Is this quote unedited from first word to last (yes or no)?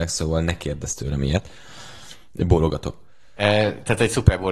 yes